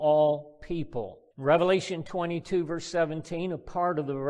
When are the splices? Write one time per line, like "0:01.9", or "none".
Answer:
0:01.3